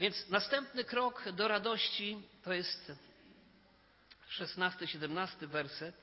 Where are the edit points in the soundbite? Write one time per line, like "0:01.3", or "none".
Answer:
none

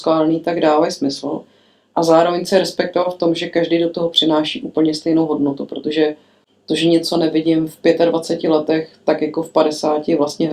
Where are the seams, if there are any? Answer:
none

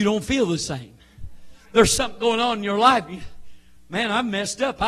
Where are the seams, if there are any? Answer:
none

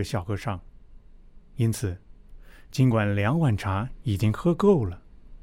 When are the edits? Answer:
0:01.5

